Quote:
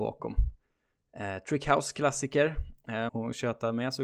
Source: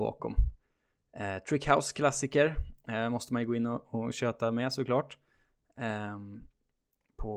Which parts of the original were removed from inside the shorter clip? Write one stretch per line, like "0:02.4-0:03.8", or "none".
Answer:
0:03.1-0:03.9